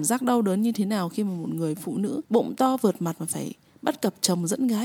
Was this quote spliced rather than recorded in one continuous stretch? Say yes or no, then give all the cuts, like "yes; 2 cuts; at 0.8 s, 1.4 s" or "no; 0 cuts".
yes; 1 cut; at 2.3 s